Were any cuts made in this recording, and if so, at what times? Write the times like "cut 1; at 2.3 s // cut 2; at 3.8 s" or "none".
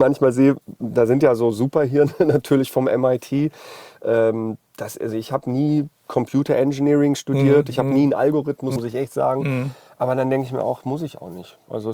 cut 1; at 8.8 s